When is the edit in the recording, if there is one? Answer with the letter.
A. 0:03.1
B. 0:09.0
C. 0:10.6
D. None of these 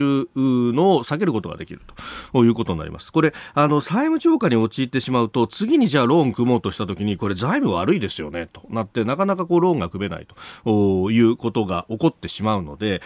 D